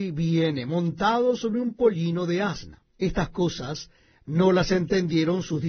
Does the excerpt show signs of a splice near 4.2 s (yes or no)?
no